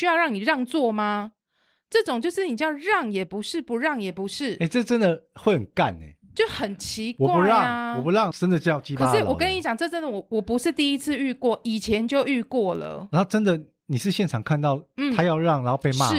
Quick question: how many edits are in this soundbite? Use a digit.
1